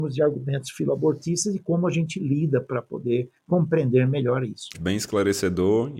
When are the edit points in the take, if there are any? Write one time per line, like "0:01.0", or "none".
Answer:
0:04.7